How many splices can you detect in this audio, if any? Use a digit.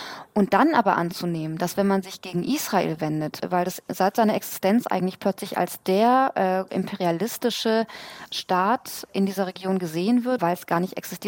2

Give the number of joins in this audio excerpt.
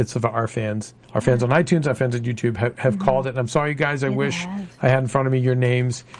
1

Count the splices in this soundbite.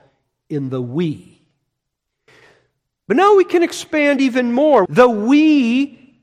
1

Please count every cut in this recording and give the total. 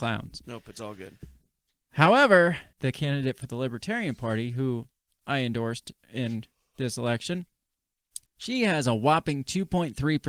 2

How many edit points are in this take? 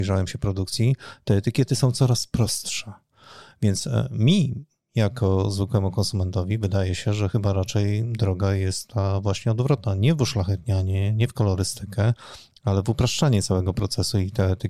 0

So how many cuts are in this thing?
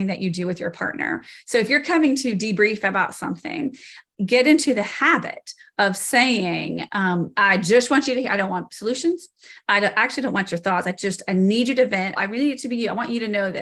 1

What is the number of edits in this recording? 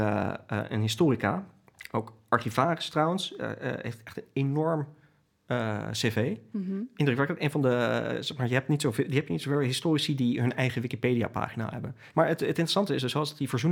1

